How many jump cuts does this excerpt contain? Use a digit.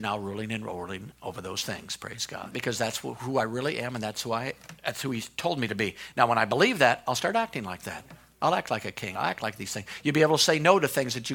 2